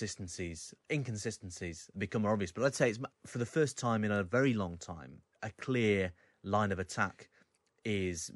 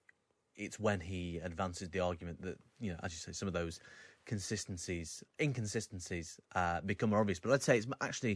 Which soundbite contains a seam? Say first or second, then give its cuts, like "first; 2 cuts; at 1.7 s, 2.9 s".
first; 3 cuts; at 1.9 s, 3.1 s, 5.3 s